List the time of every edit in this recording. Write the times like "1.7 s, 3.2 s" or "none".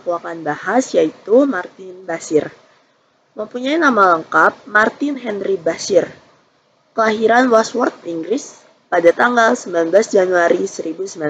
8.0 s